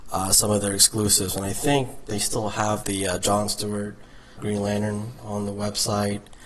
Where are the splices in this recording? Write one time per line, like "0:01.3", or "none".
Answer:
0:02.8
0:04.4